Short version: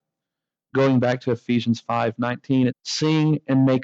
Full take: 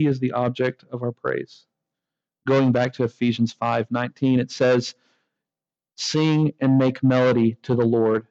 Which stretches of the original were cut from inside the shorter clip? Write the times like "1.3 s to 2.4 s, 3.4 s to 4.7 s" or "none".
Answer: 4.4 s to 5.8 s